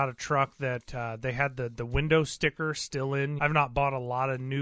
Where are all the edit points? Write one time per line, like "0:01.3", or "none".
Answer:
0:03.4